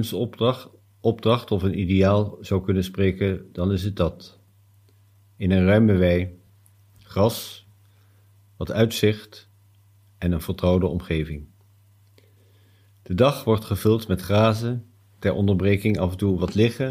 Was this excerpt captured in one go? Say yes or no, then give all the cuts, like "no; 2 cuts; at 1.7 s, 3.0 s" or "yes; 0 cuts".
yes; 0 cuts